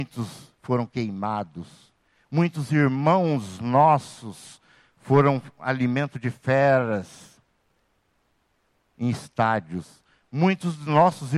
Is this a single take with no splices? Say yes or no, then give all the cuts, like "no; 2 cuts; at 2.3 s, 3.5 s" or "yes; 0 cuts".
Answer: yes; 0 cuts